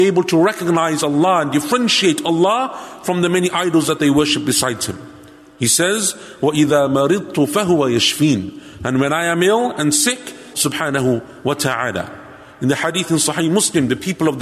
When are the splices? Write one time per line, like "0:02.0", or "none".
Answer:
0:10.5